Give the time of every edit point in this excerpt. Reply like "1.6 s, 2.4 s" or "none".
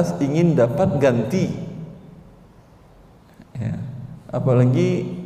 none